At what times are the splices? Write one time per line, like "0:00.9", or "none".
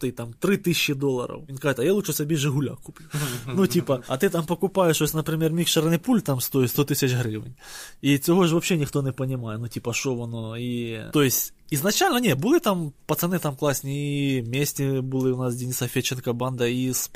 none